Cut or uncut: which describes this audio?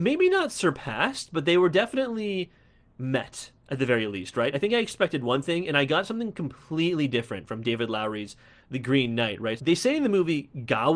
cut